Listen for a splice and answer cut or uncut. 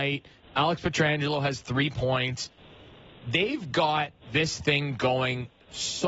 cut